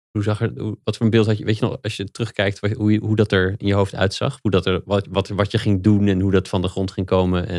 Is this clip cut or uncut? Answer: uncut